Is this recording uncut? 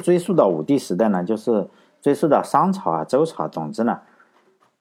yes; 0 cuts

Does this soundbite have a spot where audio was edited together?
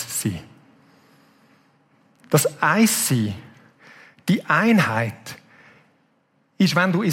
no; 0 cuts

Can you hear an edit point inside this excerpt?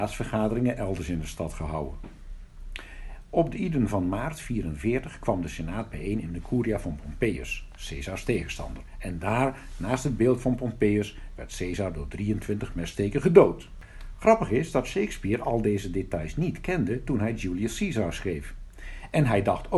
no; 0 cuts

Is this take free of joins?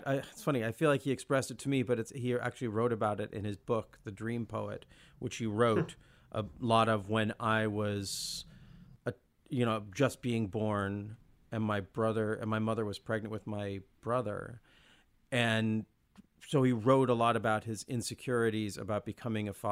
yes; 0 cuts

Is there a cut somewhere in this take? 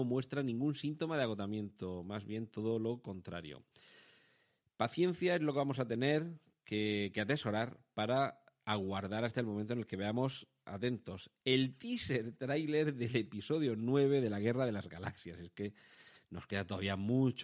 no; 0 cuts

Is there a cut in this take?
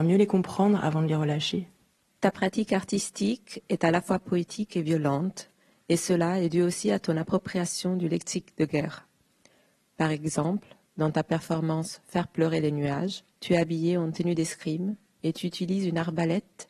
yes; 2 cuts; at 9.8 s, 13.3 s

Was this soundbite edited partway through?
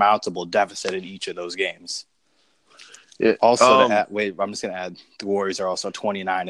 no; 0 cuts

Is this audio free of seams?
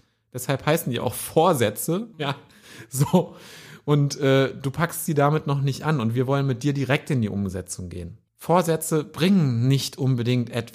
no; 2 cuts; at 2.1 s, 8.3 s

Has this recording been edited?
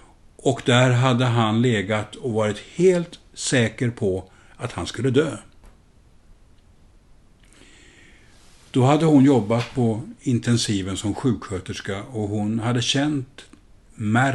no; 0 cuts

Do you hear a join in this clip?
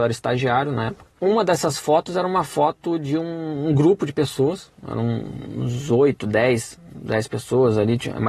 yes; 1 cut; at 1.2 s

